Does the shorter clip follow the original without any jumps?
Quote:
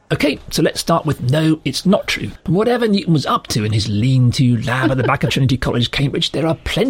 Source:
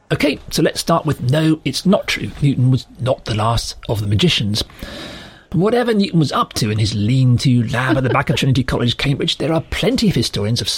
no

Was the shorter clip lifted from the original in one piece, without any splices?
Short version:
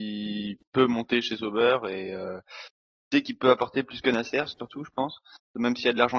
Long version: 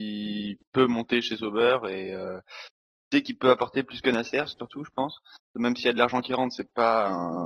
yes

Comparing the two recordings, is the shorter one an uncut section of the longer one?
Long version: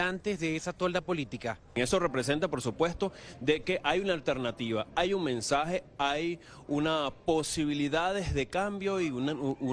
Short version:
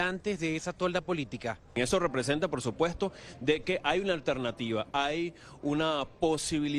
no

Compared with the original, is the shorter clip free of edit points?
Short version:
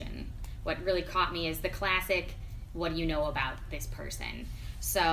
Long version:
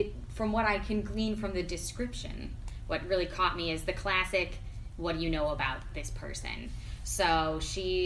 yes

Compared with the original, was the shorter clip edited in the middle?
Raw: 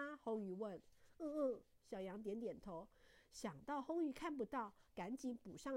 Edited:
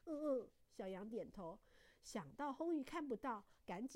yes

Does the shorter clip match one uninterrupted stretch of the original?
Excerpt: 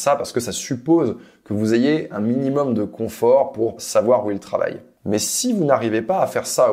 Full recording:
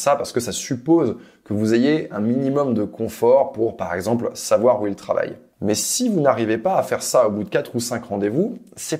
no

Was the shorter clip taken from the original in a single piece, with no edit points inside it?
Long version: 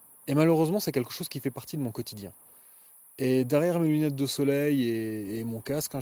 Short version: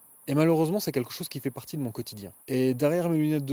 no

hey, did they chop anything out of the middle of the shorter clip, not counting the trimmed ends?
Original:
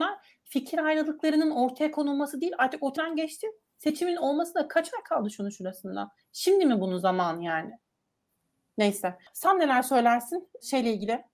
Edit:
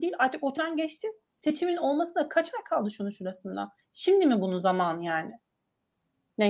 no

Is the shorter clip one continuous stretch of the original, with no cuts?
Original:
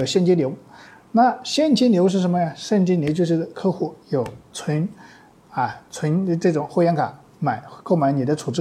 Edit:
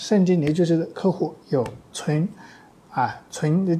yes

